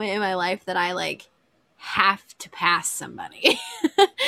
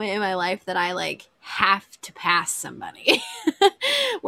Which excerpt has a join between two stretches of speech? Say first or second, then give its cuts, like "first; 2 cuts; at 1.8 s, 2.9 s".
second; 1 cut; at 1.3 s